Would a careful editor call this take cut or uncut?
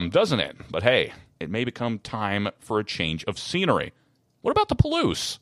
cut